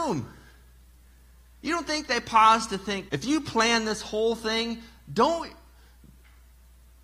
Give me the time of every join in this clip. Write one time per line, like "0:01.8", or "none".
0:03.1